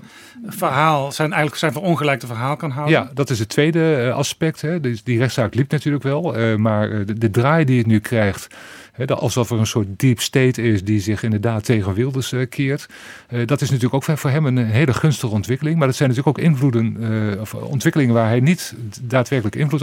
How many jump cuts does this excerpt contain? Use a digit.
0